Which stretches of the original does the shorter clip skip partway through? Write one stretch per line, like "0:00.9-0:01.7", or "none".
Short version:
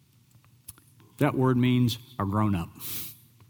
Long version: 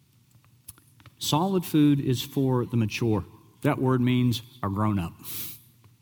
0:01.0-0:03.4